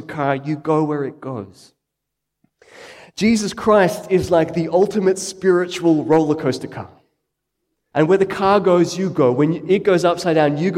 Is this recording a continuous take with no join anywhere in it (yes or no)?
no